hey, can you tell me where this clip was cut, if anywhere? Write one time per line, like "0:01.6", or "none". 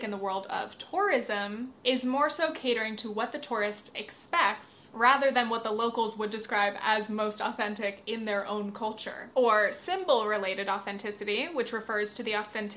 0:09.3